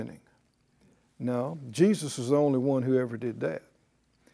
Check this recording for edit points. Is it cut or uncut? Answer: uncut